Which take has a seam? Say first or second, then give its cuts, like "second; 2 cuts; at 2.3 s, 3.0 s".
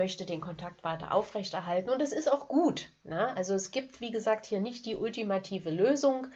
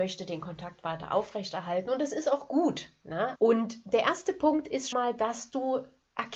second; 2 cuts; at 3.4 s, 4.9 s